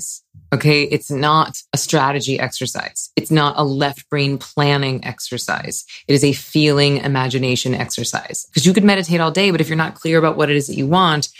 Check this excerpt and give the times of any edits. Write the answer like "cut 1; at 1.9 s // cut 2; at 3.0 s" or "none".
cut 1; at 1.7 s // cut 2; at 8.5 s